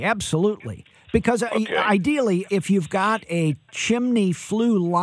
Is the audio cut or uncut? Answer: cut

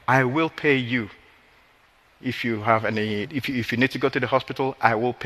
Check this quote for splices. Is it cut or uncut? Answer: cut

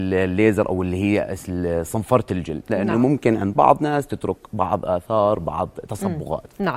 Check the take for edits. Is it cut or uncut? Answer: uncut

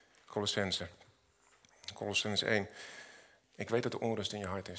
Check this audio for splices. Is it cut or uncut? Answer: cut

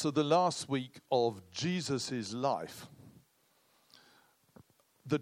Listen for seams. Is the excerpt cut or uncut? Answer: uncut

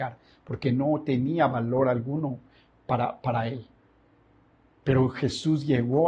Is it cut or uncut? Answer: uncut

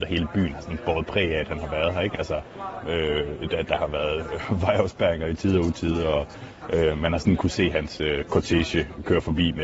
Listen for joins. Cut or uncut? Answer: cut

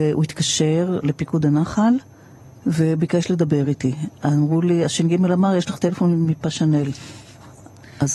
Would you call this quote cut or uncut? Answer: uncut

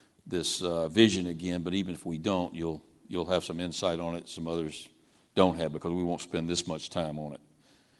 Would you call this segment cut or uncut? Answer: uncut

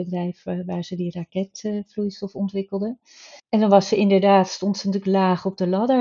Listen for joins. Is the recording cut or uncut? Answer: cut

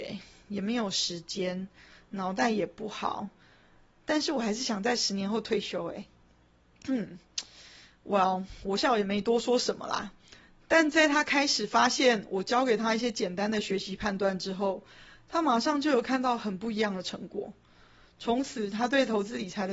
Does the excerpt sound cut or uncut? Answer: cut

